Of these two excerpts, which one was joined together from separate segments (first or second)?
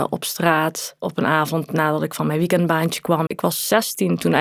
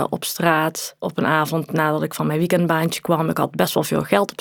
first